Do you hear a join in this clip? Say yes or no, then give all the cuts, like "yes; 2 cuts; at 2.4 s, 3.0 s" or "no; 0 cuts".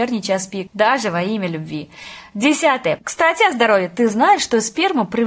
yes; 1 cut; at 3.0 s